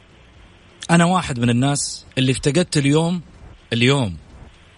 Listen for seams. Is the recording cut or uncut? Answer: cut